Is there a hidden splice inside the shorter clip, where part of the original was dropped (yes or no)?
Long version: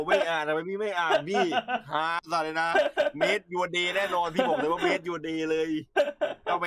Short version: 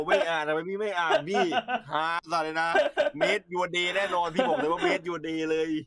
no